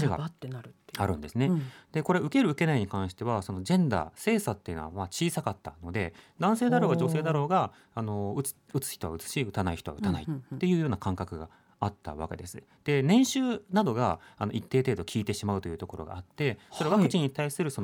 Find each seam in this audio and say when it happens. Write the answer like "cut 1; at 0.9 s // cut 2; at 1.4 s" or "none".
none